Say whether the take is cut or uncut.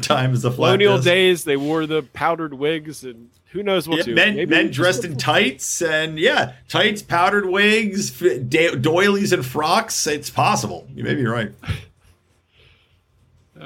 cut